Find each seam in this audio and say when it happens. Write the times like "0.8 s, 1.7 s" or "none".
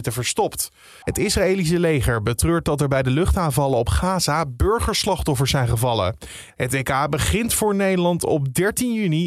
1.0 s, 6.5 s